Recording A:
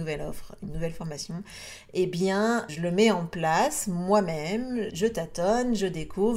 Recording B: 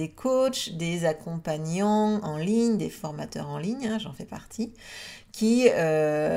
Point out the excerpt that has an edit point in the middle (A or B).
A